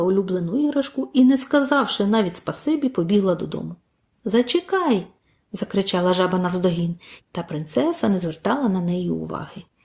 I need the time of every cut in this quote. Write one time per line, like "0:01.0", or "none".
0:07.2